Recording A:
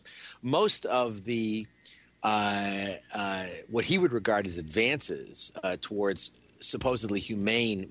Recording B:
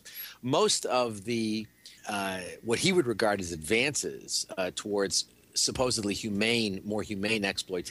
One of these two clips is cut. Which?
B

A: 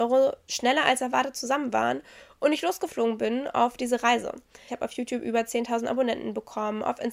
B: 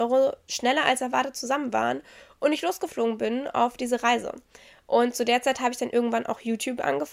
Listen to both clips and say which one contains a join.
A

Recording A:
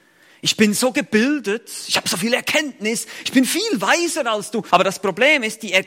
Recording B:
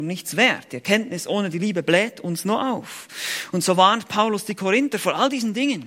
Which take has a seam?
A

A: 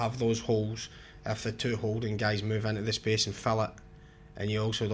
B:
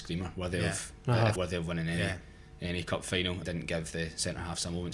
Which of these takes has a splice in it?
B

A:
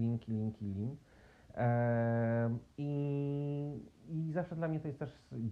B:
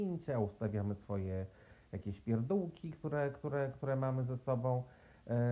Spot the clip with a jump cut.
A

